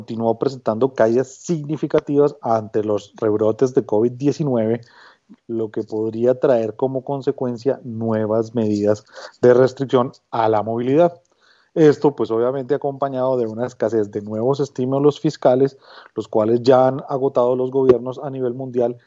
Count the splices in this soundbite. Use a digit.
1